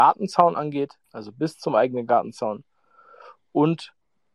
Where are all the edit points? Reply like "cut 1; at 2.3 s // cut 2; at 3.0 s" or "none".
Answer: cut 1; at 1.0 s